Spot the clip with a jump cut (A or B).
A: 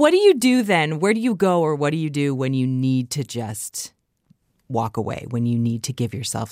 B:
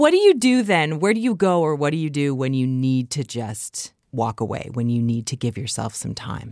B